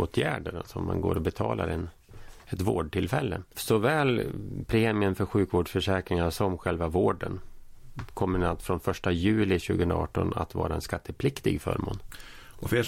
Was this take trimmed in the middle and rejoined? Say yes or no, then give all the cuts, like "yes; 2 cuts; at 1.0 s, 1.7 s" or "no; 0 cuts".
yes; 1 cut; at 3.5 s